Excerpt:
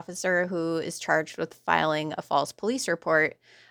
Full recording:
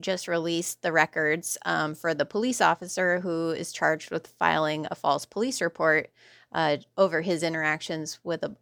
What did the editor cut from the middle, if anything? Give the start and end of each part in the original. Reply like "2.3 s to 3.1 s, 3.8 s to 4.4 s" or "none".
none